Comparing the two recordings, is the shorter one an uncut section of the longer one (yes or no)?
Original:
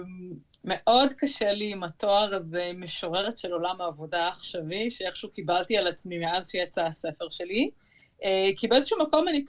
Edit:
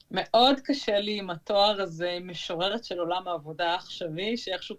yes